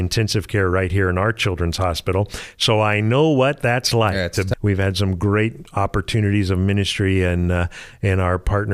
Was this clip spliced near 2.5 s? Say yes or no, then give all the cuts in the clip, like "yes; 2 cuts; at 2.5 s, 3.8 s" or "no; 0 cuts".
no; 1 cut; at 4.5 s